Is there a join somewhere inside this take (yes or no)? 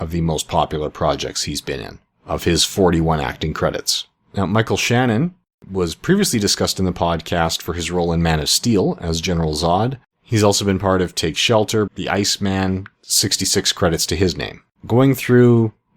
yes